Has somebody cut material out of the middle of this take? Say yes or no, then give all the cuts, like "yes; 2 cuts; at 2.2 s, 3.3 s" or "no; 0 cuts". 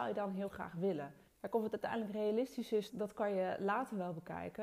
yes; 2 cuts; at 1.3 s, 2.9 s